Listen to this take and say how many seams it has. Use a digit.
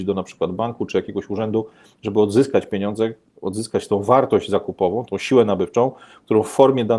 1